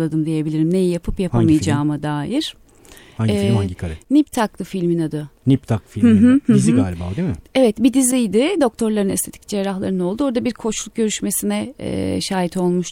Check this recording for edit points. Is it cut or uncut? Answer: uncut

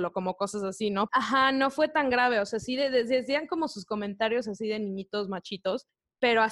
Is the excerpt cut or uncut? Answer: cut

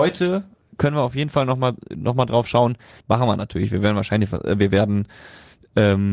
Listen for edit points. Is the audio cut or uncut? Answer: cut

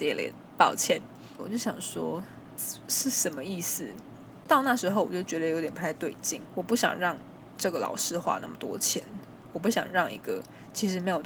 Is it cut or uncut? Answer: cut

